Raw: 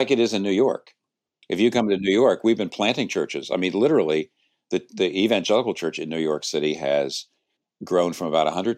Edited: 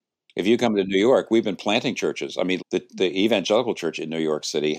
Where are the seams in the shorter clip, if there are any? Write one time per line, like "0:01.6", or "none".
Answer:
0:02.6